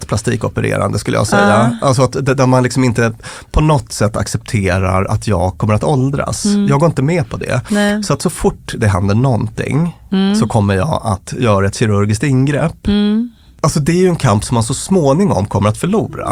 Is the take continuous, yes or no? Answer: yes